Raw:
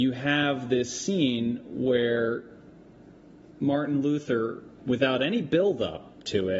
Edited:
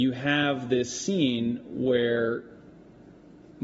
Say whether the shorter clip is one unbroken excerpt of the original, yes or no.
yes